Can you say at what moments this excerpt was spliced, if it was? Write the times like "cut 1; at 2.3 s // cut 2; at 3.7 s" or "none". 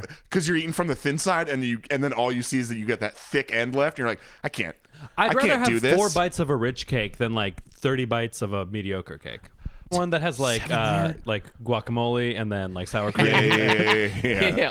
cut 1; at 9.9 s